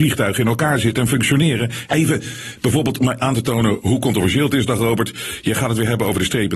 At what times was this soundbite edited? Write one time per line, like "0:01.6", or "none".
0:01.9